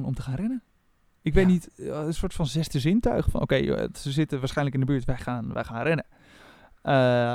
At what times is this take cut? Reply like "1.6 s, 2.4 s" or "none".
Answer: 2.2 s